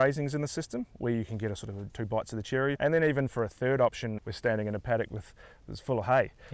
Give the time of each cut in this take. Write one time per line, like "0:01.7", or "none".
0:02.7
0:04.2